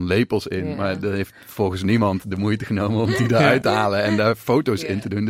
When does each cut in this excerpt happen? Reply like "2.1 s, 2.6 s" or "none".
none